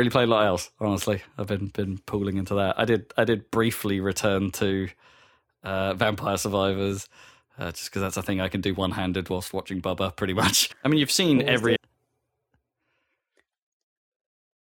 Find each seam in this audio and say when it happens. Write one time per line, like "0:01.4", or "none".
0:10.7
0:11.8